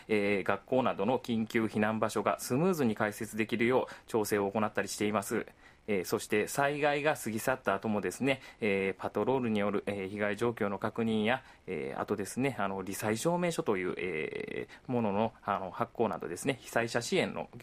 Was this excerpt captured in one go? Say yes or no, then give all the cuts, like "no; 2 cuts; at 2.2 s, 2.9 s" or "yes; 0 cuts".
yes; 0 cuts